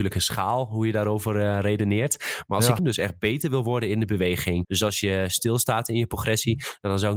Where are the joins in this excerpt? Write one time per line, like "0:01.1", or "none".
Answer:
0:02.8
0:04.6